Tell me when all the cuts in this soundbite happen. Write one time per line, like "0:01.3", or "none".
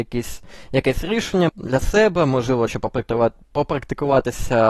0:01.5
0:02.7